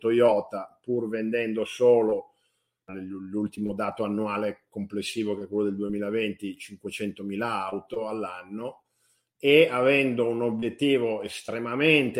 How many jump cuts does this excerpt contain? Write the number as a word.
one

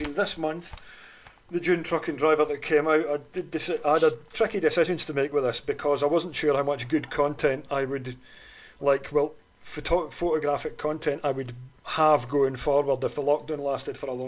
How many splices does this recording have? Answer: zero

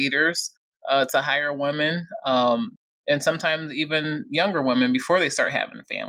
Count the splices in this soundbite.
zero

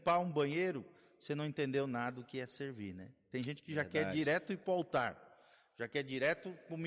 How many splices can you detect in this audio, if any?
zero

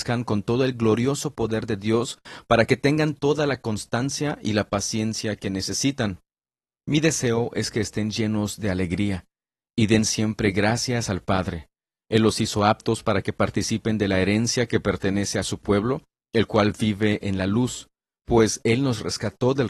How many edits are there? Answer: zero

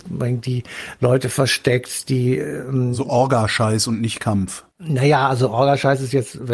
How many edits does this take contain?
one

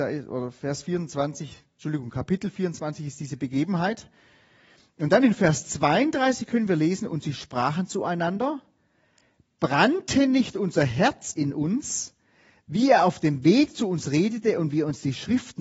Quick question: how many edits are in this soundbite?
zero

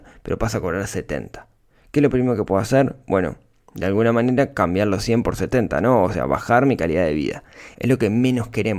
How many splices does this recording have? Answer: one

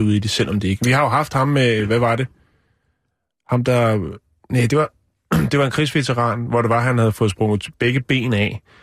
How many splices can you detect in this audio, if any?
zero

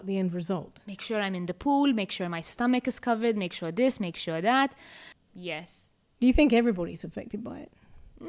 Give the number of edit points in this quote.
one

